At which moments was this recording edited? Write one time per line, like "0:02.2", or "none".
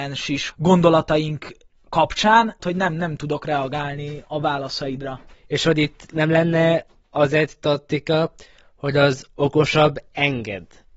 0:02.6
0:05.3